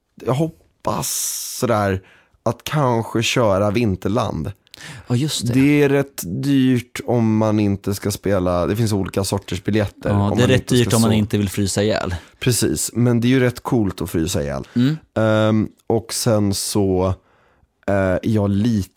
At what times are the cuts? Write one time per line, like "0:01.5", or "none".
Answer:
0:14.7